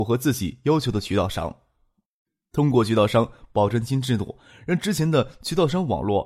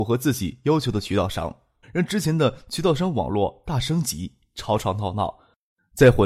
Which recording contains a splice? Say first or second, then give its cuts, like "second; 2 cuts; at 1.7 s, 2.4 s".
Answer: second; 1 cut; at 1.8 s